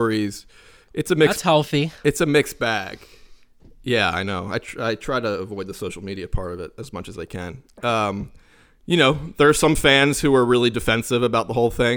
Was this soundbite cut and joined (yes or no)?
no